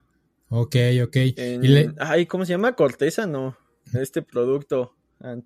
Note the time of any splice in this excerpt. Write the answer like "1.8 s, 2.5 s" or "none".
3.9 s